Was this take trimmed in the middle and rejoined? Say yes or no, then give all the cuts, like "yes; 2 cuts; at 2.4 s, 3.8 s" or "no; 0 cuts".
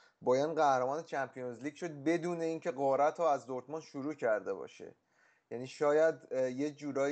no; 0 cuts